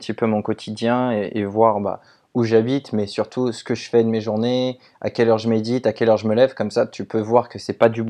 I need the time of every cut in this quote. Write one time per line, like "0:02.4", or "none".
none